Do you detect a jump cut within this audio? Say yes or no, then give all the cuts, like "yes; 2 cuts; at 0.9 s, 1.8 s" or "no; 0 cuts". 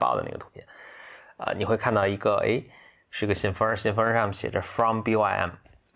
no; 0 cuts